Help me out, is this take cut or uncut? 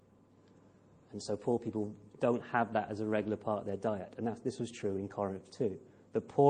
uncut